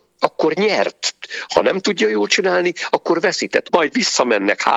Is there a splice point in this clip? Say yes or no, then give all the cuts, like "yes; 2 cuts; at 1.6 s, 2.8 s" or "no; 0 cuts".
yes; 1 cut; at 3.7 s